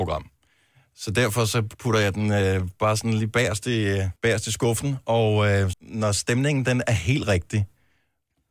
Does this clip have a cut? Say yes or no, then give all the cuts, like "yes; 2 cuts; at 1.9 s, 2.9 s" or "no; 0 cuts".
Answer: yes; 2 cuts; at 4.2 s, 5.7 s